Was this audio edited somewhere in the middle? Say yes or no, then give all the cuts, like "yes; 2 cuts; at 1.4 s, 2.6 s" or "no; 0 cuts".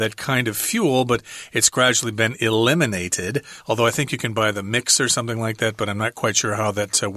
no; 0 cuts